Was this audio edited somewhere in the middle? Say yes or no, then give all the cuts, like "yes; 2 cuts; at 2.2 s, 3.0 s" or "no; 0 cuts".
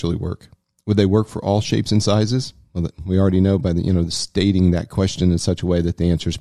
no; 0 cuts